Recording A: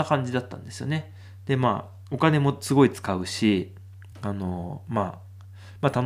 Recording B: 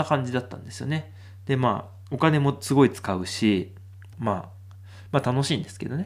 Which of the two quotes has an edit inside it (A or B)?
B